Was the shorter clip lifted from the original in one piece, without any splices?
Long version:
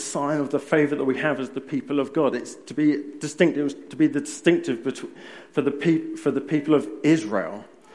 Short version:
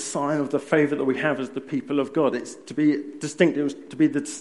yes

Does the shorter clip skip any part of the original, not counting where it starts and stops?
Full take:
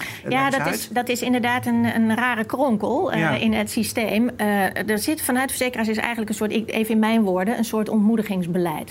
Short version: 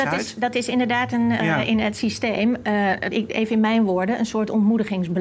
yes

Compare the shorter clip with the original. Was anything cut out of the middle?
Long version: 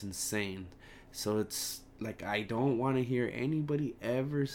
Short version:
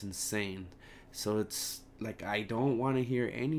no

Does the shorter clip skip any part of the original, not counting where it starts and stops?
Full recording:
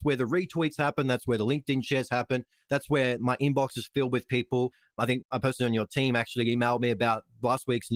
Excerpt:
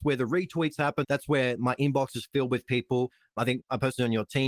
yes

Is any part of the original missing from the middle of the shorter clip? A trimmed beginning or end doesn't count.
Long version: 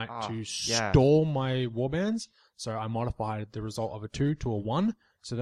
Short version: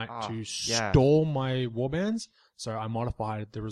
no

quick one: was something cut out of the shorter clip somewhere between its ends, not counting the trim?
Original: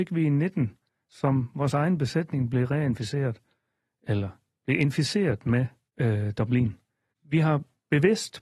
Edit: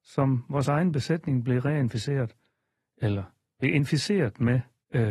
no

